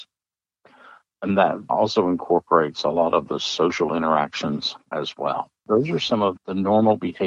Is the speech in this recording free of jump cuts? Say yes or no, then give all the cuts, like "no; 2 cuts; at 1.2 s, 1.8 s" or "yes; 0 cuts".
yes; 0 cuts